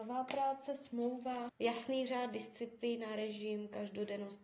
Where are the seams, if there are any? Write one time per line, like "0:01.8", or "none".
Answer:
0:01.5